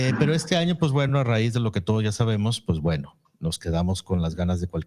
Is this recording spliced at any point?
no; 0 cuts

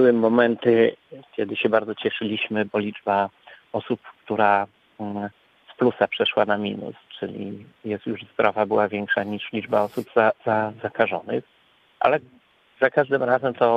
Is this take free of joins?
yes; 0 cuts

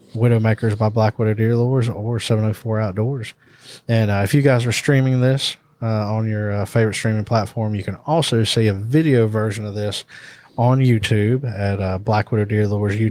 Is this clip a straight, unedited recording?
yes; 0 cuts

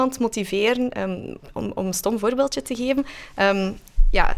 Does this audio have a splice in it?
no; 0 cuts

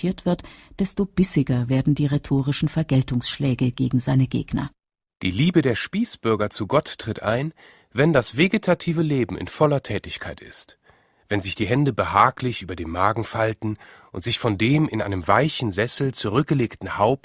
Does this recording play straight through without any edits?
yes; 0 cuts

